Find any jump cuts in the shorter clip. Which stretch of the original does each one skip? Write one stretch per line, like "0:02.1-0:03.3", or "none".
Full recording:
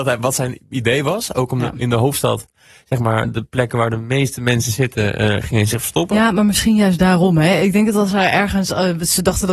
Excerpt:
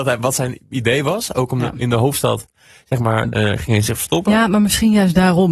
0:03.3-0:05.2